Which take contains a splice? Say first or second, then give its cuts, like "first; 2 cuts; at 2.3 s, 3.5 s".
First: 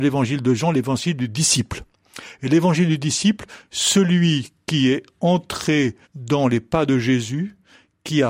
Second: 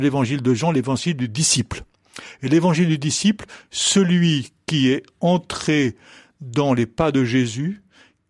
first; 1 cut; at 6.0 s